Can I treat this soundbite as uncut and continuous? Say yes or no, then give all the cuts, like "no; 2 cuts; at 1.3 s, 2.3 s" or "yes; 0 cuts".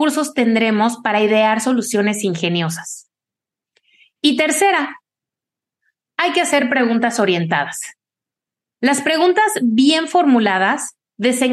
yes; 0 cuts